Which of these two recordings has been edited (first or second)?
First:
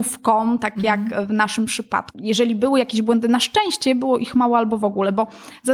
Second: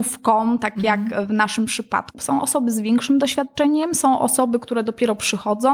second